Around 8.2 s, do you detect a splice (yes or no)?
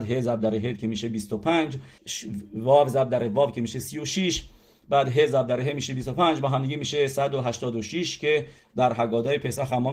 no